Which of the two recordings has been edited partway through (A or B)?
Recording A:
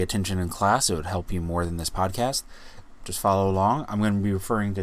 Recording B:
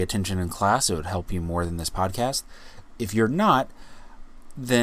A